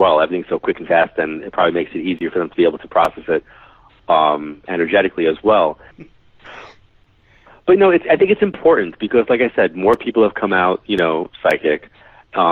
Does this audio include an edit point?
yes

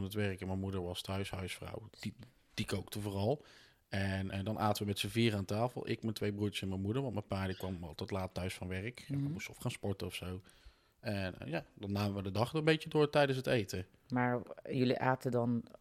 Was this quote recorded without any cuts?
no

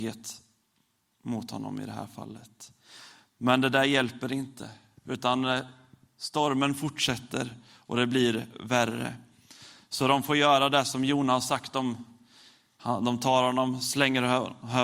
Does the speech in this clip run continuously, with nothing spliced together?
yes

